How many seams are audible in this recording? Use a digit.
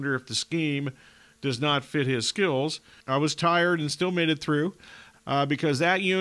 2